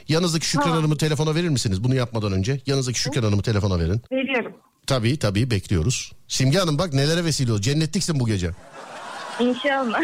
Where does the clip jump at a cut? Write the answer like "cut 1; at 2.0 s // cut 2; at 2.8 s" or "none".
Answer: cut 1; at 4.0 s